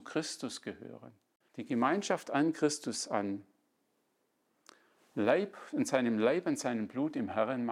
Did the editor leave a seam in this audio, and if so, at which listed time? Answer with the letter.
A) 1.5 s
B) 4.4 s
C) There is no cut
A